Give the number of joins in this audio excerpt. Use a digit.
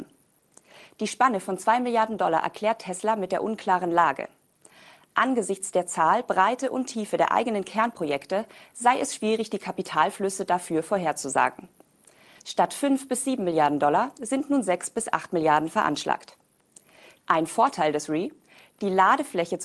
2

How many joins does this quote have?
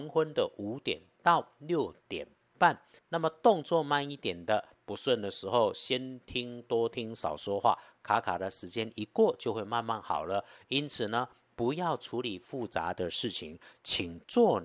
1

